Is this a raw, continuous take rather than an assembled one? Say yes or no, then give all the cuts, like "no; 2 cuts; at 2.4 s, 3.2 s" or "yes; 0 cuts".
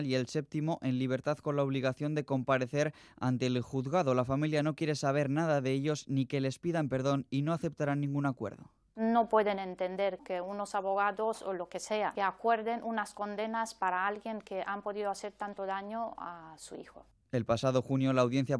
yes; 0 cuts